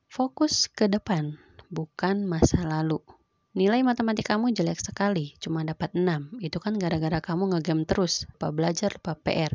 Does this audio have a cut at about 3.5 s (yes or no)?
yes